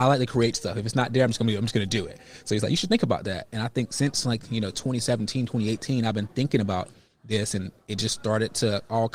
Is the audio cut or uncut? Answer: uncut